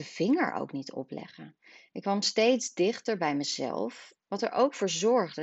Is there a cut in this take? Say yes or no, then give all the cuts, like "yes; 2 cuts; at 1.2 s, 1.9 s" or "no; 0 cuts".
no; 0 cuts